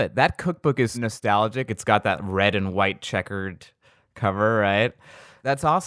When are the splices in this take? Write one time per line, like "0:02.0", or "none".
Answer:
0:00.9